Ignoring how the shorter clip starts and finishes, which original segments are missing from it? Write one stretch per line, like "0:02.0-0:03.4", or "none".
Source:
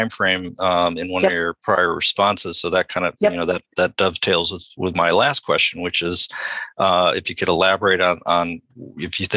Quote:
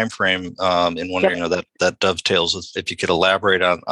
0:01.3-0:03.3
0:04.7-0:07.1